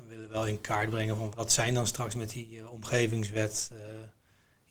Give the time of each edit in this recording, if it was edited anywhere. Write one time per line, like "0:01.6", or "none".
0:01.3